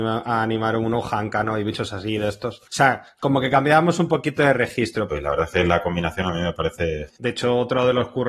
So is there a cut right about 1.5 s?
no; 2 cuts; at 5.1 s, 7.2 s

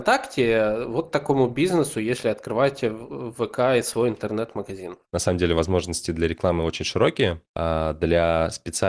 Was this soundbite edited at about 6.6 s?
no; 1 cut; at 5.0 s

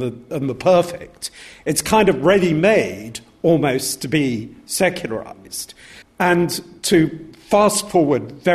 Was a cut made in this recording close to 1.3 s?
no; 1 cut; at 6.0 s

